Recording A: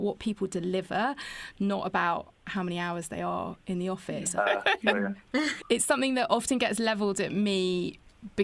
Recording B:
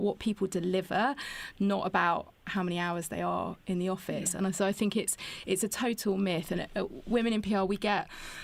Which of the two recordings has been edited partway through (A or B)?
A